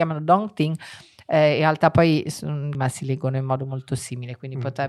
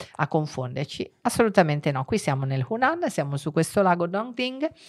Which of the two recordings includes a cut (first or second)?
first